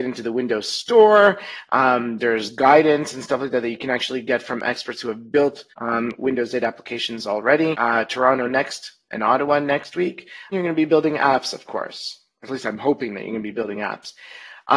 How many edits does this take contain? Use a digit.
3